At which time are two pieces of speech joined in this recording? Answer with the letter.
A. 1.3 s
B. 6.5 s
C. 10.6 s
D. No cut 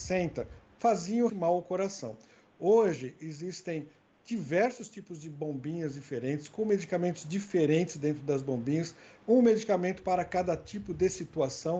A